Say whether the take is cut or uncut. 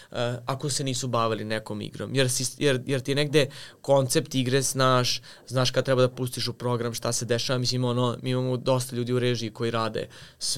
uncut